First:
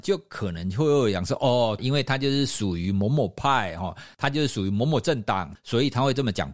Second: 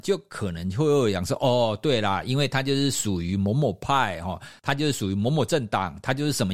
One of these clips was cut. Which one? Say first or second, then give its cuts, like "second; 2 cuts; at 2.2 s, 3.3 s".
first; 2 cuts; at 1.8 s, 5.6 s